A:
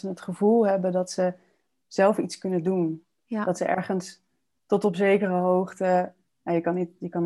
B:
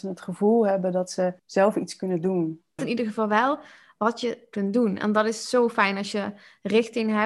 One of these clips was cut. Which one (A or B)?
B